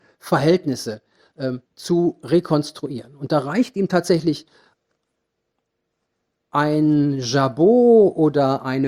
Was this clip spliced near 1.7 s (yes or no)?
yes